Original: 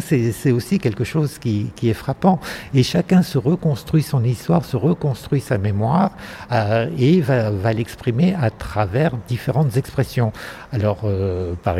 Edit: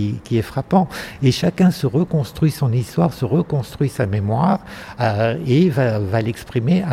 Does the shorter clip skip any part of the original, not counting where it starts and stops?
no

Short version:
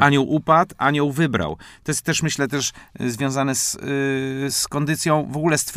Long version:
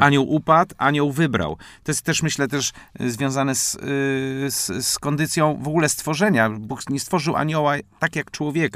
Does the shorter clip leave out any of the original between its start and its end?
yes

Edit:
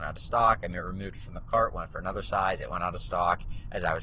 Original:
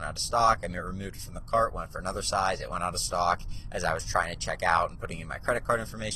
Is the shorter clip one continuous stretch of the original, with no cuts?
yes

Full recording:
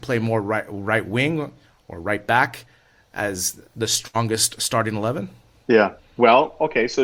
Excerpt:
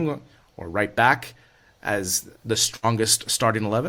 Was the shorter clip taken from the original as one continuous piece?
yes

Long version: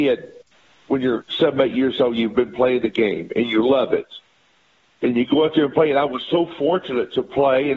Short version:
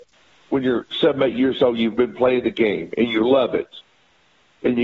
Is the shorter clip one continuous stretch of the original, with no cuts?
yes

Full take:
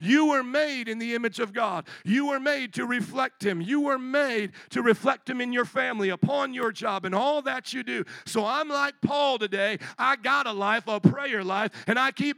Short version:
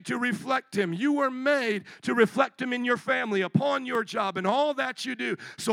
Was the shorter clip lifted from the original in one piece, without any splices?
yes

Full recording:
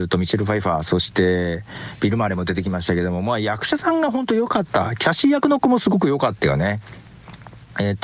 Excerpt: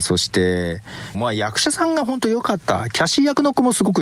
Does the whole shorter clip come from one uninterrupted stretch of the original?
no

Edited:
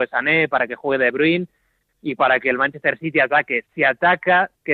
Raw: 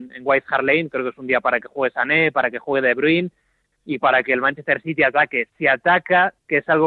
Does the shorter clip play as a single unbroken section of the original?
yes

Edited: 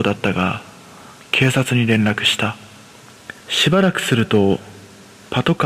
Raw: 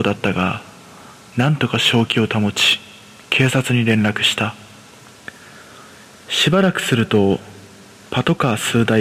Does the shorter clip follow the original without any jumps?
no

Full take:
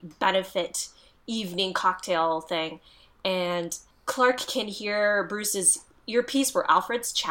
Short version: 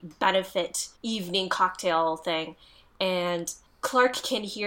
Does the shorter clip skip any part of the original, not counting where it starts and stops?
yes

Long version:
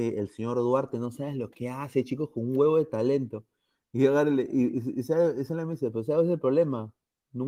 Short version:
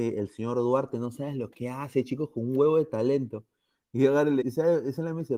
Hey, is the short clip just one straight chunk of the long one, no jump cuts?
no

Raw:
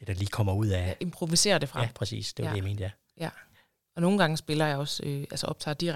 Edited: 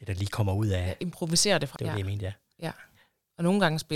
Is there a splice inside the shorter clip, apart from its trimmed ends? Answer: yes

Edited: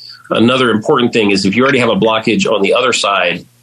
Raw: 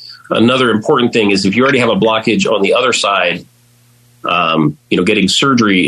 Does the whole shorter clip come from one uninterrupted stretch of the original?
yes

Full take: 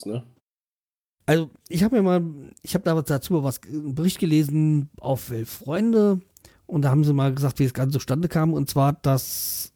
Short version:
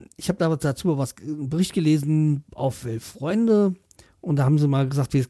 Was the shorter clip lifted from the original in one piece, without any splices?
yes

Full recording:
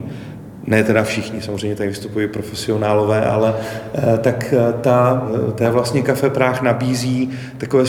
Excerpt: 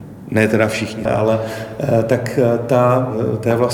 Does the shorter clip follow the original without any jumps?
no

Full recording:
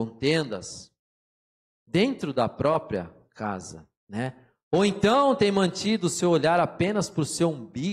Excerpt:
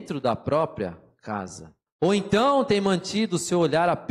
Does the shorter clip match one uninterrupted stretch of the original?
no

